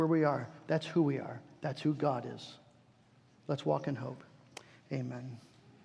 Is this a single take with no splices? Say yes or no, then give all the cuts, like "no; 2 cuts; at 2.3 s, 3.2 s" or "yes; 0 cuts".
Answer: yes; 0 cuts